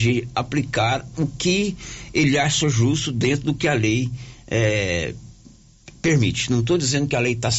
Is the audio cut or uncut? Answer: uncut